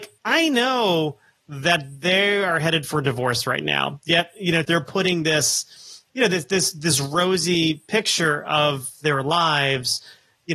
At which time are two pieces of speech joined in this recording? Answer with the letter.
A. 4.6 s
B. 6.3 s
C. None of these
A